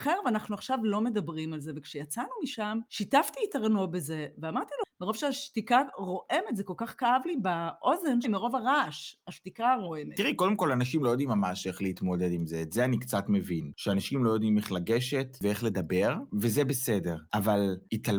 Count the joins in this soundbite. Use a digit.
1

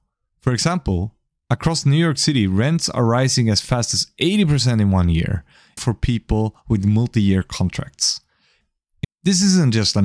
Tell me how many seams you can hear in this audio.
2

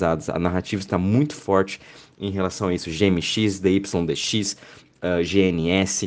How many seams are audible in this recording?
0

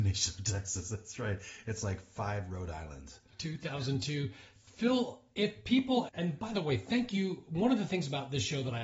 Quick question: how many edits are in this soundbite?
1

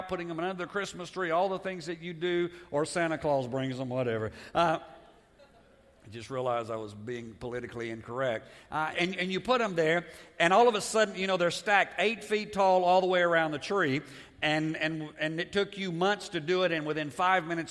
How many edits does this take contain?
1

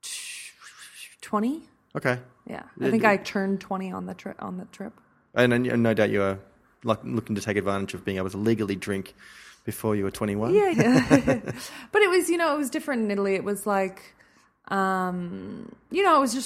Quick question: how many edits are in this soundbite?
1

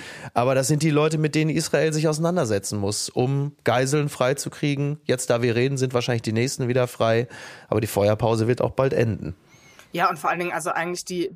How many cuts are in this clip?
0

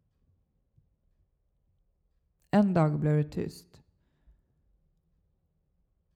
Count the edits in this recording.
0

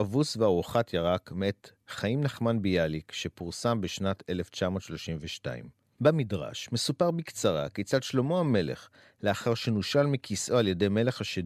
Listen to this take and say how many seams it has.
1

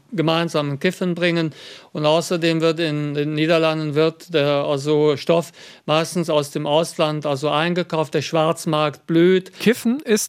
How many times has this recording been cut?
0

